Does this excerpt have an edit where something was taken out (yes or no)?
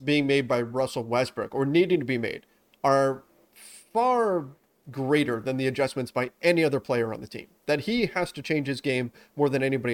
no